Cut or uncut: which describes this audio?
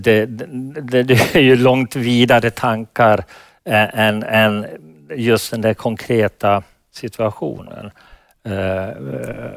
uncut